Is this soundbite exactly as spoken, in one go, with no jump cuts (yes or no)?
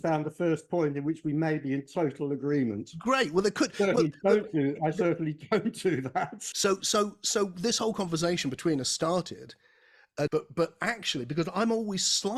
no